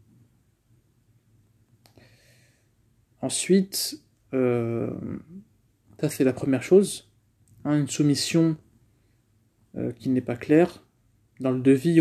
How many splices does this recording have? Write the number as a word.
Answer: zero